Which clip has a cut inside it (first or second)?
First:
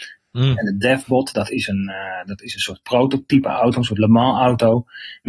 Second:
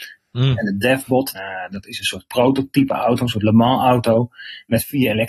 second